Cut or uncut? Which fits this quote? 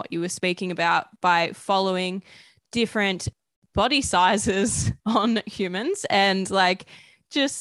uncut